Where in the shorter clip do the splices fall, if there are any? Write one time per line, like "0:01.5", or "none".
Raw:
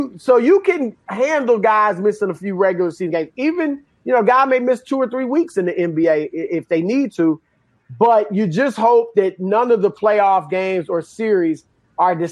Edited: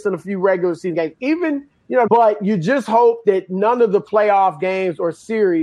0:02.1